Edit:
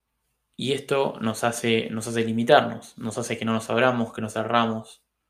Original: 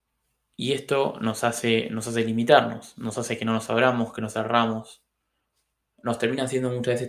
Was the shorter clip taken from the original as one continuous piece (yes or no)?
yes